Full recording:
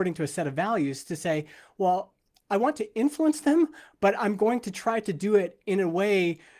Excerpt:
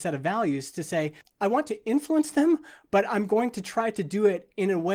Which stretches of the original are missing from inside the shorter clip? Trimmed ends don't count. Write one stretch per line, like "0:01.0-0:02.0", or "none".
0:01.5-0:02.3